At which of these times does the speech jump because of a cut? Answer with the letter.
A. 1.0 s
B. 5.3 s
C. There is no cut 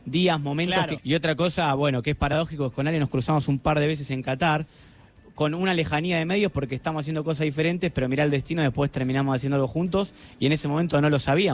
A